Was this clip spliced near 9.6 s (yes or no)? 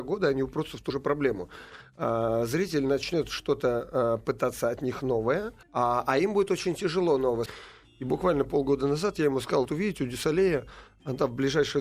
yes